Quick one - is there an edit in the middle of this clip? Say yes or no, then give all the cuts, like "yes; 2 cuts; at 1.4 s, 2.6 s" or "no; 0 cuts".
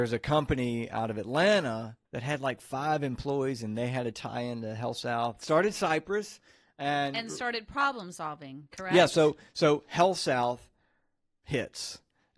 yes; 2 cuts; at 2.1 s, 5.4 s